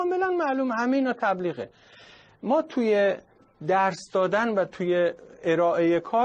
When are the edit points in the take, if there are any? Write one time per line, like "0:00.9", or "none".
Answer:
none